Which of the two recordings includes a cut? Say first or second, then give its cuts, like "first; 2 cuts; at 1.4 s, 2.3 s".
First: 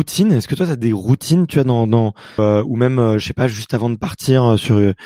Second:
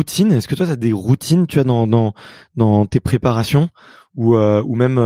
first; 1 cut; at 2.4 s